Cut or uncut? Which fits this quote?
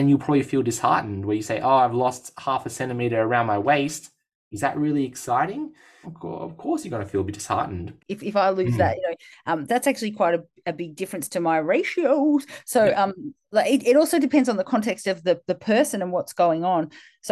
cut